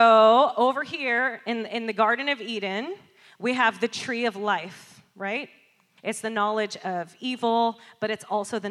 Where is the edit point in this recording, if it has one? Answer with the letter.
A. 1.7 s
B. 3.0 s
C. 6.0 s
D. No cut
C